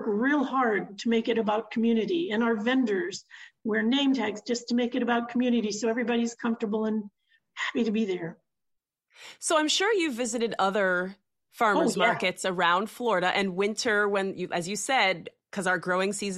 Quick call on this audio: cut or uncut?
uncut